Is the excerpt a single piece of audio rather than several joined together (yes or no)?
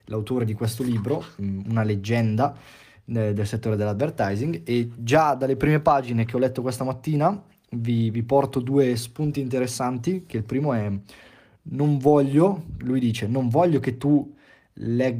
yes